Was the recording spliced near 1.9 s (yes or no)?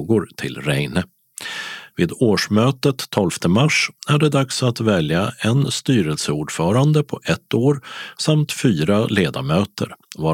yes